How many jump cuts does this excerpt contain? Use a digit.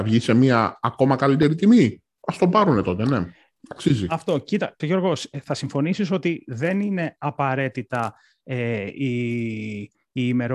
1